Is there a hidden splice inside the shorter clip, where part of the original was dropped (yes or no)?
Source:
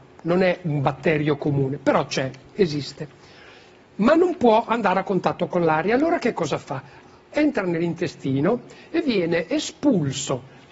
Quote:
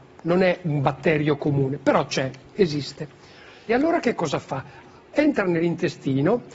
yes